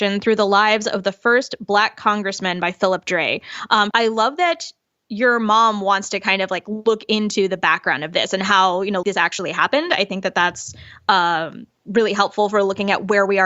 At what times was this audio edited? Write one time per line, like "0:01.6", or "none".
0:03.9
0:09.0